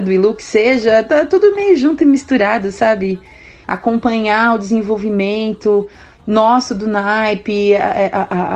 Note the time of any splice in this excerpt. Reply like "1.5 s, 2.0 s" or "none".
3.6 s

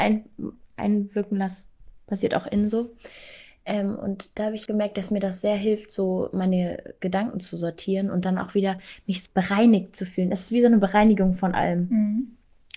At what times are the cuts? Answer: 4.7 s, 9.3 s

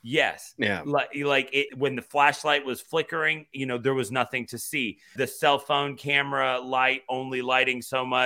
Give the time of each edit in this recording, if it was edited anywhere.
1.7 s, 5.2 s

